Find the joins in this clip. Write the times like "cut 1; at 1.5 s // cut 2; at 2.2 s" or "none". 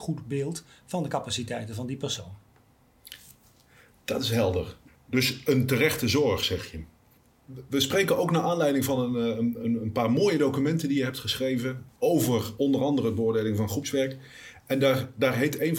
none